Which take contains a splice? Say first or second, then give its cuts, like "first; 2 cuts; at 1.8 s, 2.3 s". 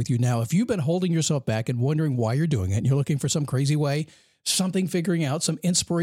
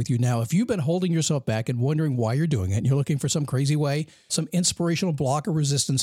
second; 1 cut; at 4.3 s